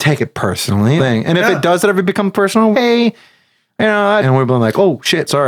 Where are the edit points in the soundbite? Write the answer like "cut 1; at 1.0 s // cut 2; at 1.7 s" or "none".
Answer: cut 1; at 1.0 s // cut 2; at 2.7 s // cut 3; at 4.2 s